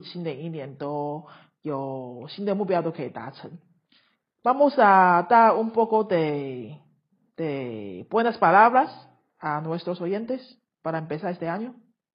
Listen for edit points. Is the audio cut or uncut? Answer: uncut